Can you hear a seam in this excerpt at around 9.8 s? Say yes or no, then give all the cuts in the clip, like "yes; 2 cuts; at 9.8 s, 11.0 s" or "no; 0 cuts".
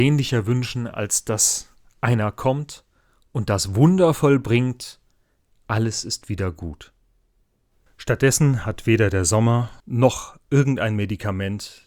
yes; 2 cuts; at 7.9 s, 9.8 s